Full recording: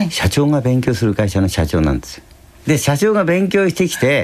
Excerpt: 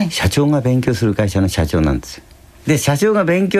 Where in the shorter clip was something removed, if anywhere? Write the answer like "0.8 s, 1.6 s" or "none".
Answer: none